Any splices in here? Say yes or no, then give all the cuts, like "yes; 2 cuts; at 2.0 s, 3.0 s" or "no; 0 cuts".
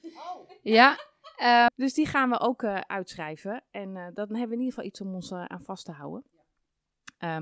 yes; 1 cut; at 1.7 s